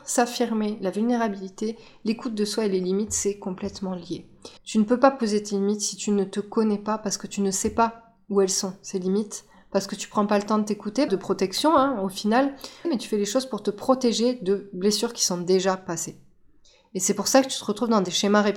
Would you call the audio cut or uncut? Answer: cut